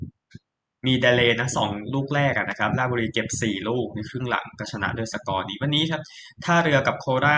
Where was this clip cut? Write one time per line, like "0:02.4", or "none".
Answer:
none